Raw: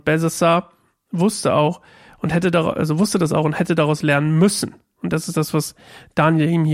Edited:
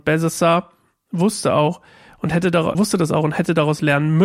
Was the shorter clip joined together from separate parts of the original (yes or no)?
yes